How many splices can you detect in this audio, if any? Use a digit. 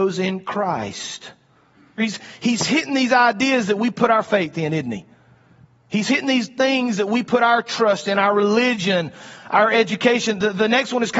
1